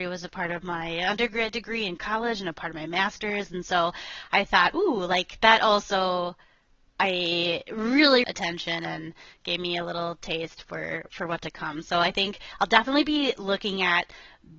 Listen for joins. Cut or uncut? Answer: cut